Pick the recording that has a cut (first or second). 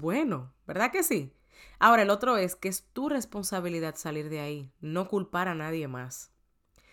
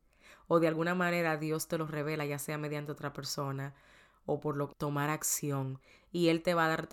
second